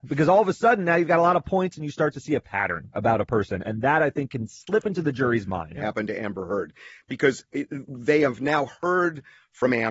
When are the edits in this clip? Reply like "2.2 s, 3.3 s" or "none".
5.7 s, 7.5 s